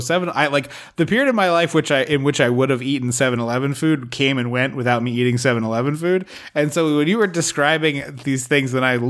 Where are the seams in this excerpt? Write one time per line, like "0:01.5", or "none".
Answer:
none